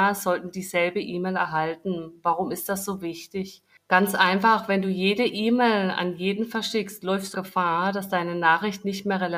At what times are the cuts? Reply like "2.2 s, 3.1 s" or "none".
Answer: 7.3 s